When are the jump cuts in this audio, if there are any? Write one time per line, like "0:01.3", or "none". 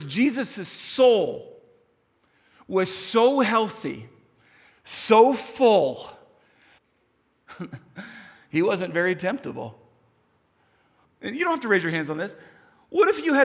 0:06.8
0:11.0